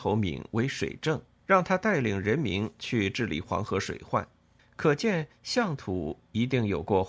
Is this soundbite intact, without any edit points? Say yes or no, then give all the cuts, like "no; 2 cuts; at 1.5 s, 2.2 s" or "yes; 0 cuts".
no; 2 cuts; at 1.4 s, 4.6 s